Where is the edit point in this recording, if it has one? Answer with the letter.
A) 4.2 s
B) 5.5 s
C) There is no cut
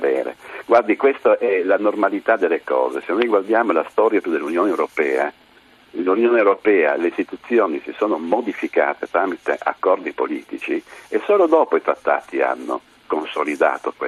A